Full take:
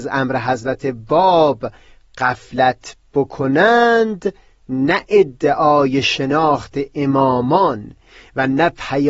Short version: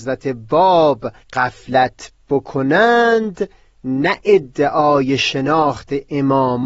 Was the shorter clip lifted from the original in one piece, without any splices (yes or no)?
no